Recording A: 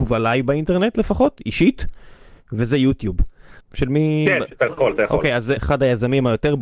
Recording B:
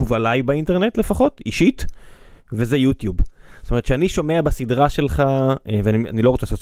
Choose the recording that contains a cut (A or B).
A